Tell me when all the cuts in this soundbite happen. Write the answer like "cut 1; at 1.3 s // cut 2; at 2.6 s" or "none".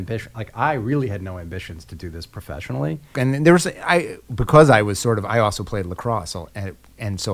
cut 1; at 3.1 s